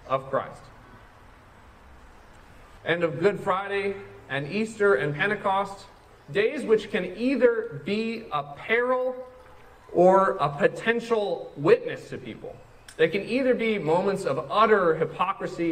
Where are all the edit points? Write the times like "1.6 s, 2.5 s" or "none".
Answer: 2.8 s